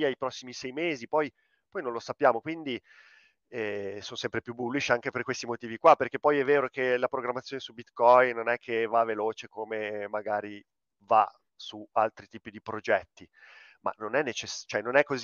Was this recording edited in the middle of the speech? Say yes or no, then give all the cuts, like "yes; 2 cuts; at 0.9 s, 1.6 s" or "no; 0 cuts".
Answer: no; 0 cuts